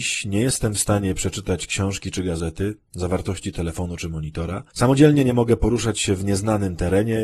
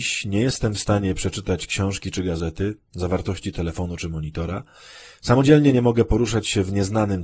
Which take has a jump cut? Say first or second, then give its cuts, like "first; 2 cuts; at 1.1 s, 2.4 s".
first; 1 cut; at 4.7 s